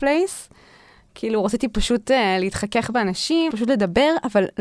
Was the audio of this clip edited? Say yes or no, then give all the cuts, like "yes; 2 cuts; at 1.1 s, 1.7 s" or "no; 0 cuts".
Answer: yes; 1 cut; at 3.5 s